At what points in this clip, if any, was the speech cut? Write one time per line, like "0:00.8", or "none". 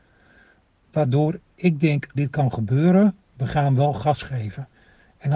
0:02.1
0:03.3